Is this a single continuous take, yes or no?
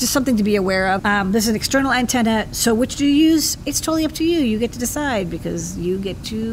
no